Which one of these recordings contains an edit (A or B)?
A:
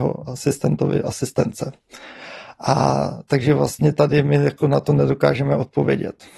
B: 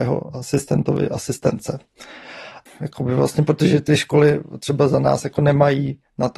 B